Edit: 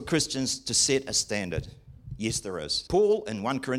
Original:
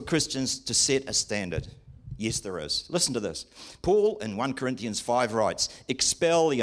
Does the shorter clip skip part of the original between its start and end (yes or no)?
yes